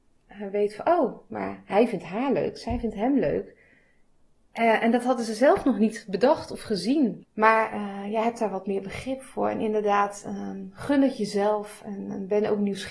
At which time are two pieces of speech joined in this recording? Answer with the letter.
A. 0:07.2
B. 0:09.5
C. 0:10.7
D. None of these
A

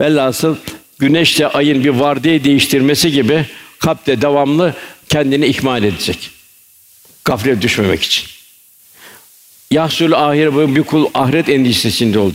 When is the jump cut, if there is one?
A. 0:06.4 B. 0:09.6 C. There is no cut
C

